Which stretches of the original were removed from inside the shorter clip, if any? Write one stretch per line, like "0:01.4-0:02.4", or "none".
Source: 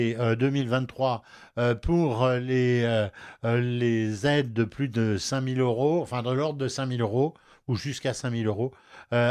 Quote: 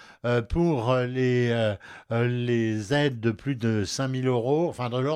none